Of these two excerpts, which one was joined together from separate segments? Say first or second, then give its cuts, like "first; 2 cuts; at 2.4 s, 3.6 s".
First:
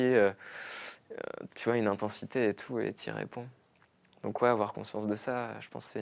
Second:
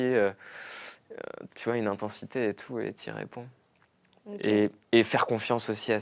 second; 1 cut; at 4.2 s